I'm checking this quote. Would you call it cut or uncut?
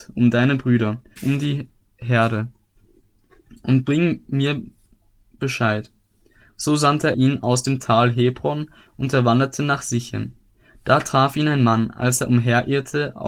cut